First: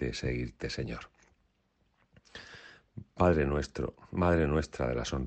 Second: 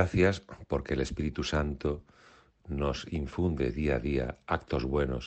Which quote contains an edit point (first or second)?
second